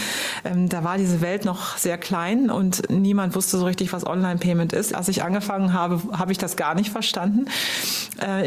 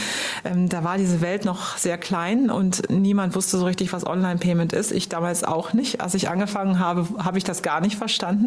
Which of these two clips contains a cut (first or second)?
first